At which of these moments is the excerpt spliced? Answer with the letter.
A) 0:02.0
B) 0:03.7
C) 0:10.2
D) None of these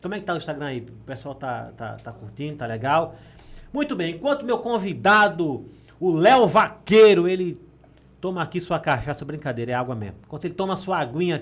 D